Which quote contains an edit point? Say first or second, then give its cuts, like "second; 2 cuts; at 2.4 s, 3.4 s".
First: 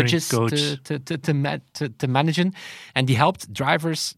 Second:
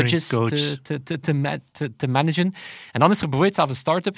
first; 1 cut; at 2.9 s